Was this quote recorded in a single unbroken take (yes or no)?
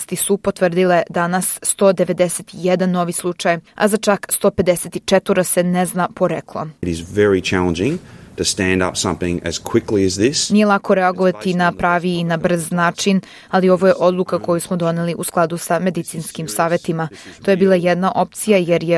no